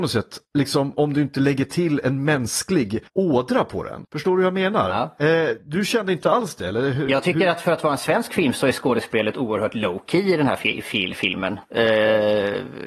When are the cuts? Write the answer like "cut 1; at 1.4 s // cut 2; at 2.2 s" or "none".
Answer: none